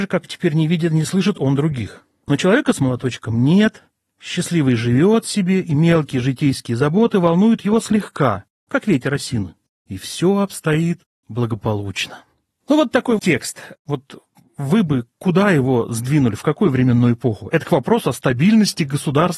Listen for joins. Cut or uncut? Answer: cut